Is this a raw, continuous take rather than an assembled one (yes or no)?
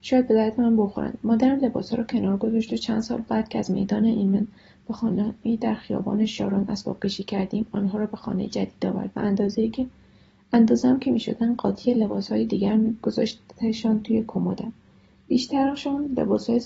yes